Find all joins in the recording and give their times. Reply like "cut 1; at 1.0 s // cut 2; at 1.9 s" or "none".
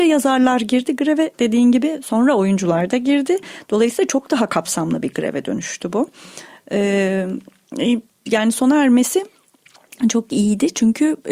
none